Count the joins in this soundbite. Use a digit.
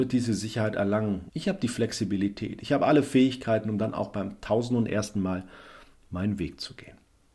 1